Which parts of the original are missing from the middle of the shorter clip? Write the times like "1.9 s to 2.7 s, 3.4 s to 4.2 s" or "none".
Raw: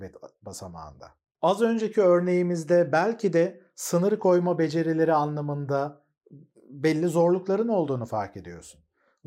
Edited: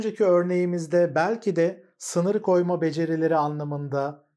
none